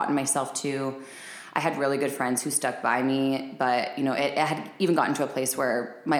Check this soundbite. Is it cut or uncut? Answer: uncut